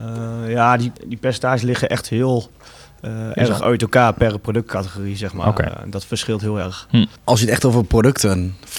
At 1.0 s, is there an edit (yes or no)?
yes